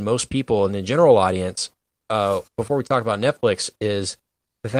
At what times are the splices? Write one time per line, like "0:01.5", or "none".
none